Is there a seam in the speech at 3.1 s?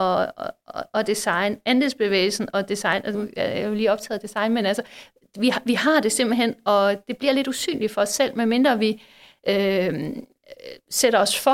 yes; 1 cut; at 3.1 s

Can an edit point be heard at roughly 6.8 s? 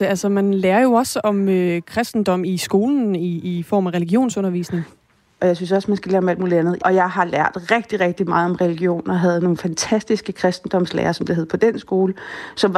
yes; 2 cuts; at 5.4 s, 6.8 s

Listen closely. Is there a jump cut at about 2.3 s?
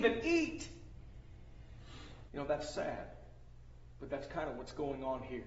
yes; 1 cut; at 2.3 s

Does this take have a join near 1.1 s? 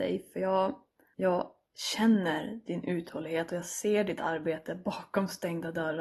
yes; 1 cut; at 1.1 s

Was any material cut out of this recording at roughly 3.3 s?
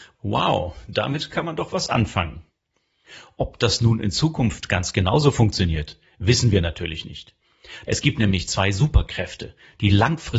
no; 1 cut; at 7.8 s

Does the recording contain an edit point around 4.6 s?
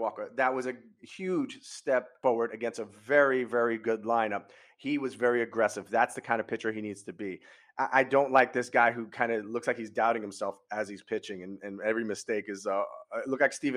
no; 0 cuts

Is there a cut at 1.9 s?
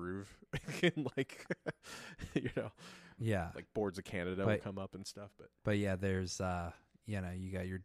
no; 2 cuts; at 3.2 s, 5.6 s

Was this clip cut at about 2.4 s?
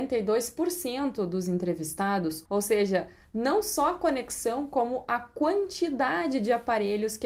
yes; 1 cut; at 2.4 s

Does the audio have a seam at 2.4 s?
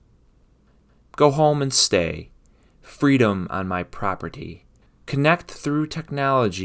no; 1 cut; at 4.9 s

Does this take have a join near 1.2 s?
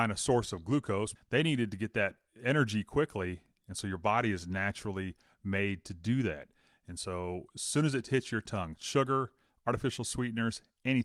yes; 1 cut; at 1.2 s

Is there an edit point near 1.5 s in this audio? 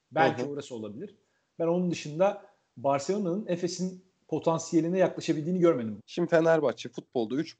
no; 1 cut; at 6.0 s

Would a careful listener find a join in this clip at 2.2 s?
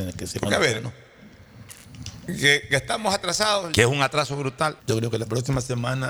no; 2 cuts; at 3.7 s, 4.8 s

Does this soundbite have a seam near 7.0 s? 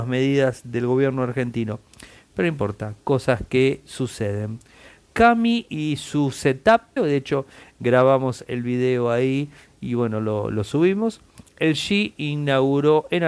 yes; 1 cut; at 7.0 s

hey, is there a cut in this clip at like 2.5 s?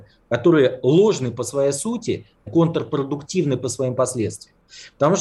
yes; 1 cut; at 2.5 s

